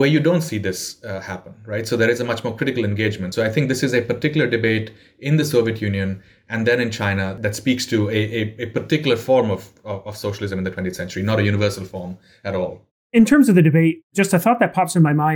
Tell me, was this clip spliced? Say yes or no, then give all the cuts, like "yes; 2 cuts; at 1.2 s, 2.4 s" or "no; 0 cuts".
no; 0 cuts